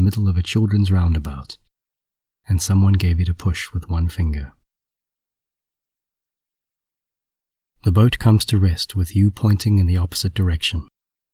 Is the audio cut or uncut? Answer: uncut